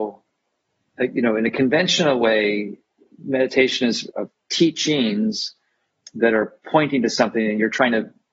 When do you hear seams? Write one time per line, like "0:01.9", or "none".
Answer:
0:04.1